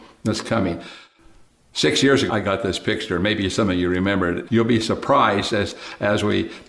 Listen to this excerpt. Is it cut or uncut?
cut